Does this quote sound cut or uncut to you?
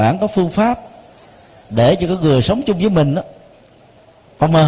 uncut